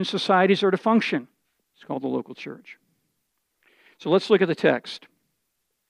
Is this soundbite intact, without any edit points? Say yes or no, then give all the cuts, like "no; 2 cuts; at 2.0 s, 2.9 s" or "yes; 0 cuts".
no; 1 cut; at 1.6 s